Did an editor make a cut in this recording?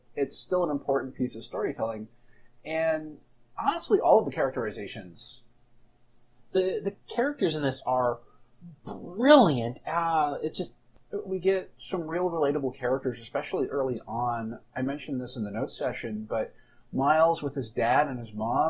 no; 0 cuts

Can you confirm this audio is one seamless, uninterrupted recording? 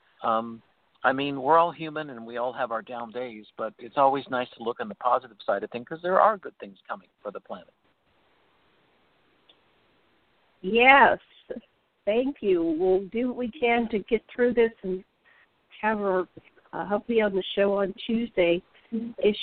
yes; 0 cuts

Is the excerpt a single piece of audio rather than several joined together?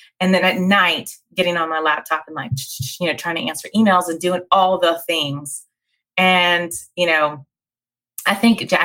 yes; 0 cuts

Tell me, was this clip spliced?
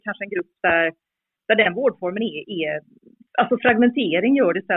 no; 0 cuts

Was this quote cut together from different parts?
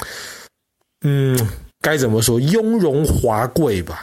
yes; 1 cut; at 1.7 s

